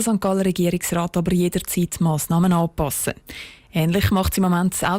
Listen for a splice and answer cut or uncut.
uncut